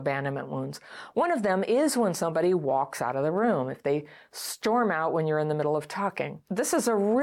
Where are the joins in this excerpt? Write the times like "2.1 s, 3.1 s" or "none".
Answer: none